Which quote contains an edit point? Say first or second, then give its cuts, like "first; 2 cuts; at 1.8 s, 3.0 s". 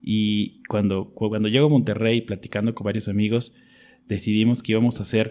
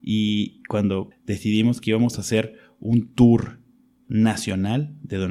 second; 1 cut; at 1.1 s